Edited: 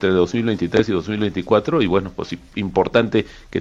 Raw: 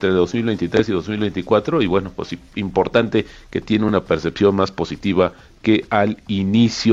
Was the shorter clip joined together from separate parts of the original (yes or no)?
no